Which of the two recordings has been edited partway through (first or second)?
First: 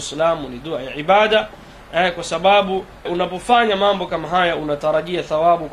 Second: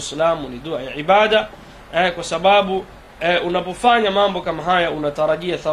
first